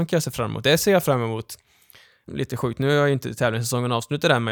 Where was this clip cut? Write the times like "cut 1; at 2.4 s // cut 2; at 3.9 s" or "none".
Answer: cut 1; at 2.3 s